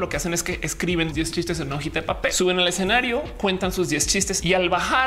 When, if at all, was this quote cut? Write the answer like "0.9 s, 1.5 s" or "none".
1.1 s